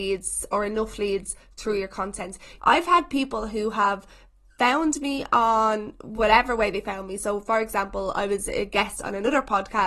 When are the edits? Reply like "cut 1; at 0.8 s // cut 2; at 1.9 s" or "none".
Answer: cut 1; at 2.6 s